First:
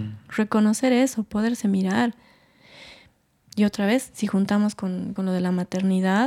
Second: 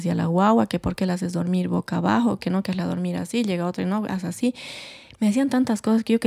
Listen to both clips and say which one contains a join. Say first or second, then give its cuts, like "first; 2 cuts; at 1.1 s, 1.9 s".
first; 1 cut; at 5.2 s